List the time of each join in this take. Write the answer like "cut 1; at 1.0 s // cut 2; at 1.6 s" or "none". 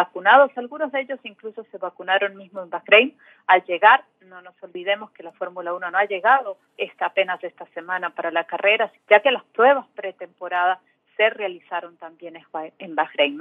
cut 1; at 6.7 s // cut 2; at 9.0 s

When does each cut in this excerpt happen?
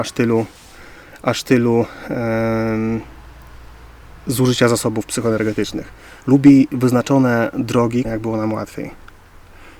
cut 1; at 6.2 s // cut 2; at 8.0 s

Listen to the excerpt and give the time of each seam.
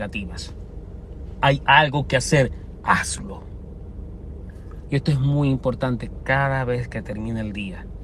cut 1; at 1.3 s // cut 2; at 4.9 s

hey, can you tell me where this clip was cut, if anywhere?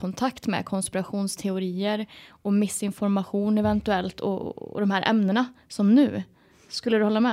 none

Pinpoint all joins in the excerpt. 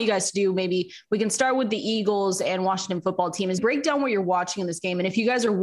cut 1; at 3.6 s

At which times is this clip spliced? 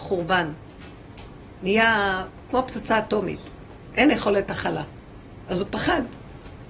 cut 1; at 1.6 s // cut 2; at 5.4 s

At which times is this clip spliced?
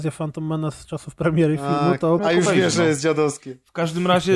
cut 1; at 2.2 s

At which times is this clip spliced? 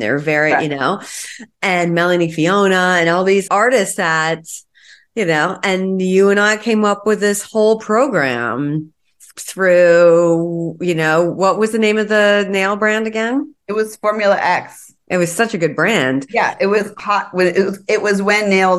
cut 1; at 3.5 s // cut 2; at 9.3 s

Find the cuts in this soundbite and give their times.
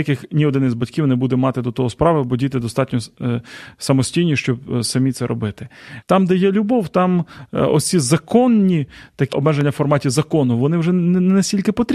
cut 1; at 6.0 s // cut 2; at 9.3 s

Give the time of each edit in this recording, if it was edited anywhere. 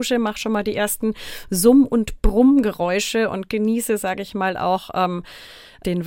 none

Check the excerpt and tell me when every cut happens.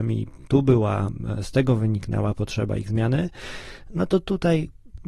none

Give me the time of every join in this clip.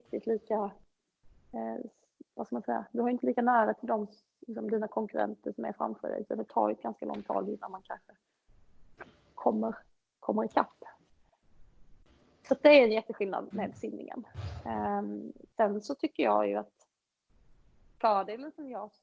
none

